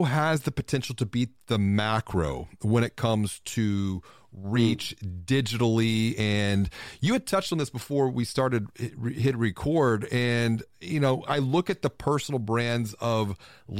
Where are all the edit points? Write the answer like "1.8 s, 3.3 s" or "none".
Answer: none